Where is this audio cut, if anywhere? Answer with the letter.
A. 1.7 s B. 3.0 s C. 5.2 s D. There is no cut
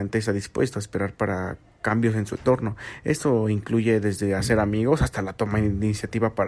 D